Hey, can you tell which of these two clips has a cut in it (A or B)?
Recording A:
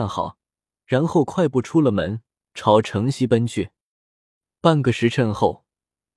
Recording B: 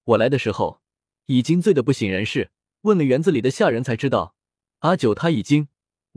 B